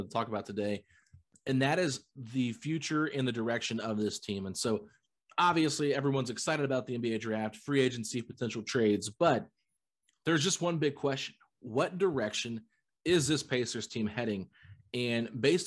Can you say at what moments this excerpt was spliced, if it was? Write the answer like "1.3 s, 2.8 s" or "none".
none

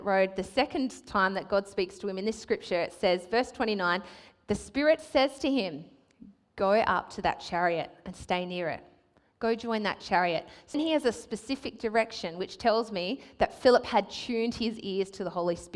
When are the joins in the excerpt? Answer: 10.7 s

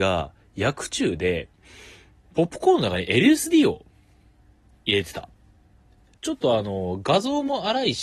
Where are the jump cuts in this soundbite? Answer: 6.2 s

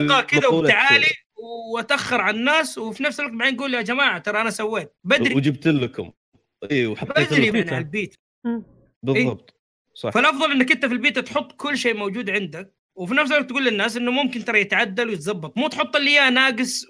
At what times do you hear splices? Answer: 5.0 s, 7.5 s

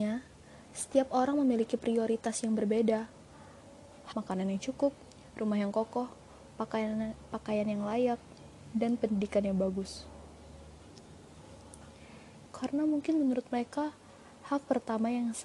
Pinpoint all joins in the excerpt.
4.1 s, 12.5 s

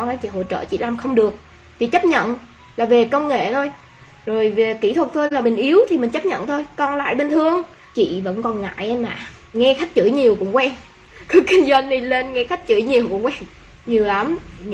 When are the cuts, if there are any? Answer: 5.4 s, 9.5 s

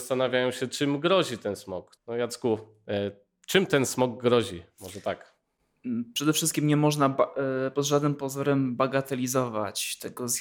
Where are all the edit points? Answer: 2.0 s

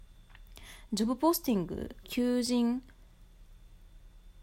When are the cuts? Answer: 2.0 s

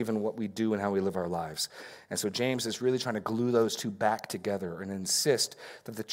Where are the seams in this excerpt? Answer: none

